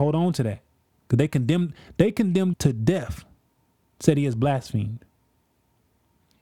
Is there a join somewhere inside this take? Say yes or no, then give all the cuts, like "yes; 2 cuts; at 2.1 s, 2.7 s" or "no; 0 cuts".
yes; 1 cut; at 2.5 s